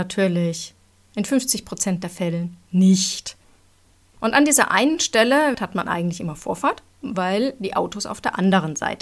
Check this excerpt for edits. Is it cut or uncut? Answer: cut